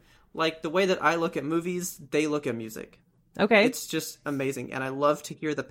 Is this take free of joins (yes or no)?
yes